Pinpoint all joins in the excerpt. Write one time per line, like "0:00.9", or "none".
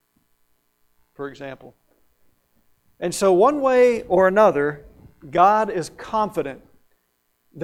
none